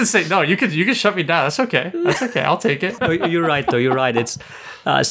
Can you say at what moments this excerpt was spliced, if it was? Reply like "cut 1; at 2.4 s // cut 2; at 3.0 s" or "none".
none